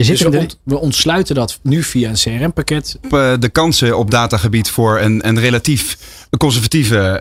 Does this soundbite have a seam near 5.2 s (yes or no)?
no